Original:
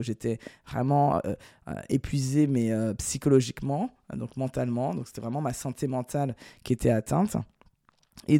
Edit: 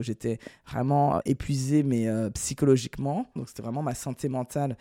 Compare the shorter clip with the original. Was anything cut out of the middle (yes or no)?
yes